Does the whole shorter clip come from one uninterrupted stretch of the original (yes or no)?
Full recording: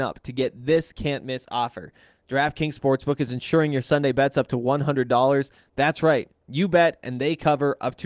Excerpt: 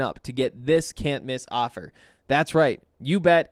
no